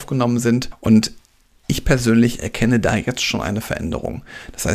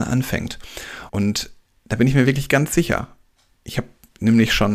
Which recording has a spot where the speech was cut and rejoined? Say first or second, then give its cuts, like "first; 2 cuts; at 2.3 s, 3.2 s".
second; 1 cut; at 1.1 s